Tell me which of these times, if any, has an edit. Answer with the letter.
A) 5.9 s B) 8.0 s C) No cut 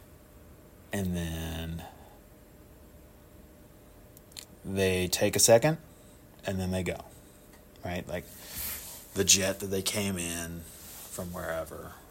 C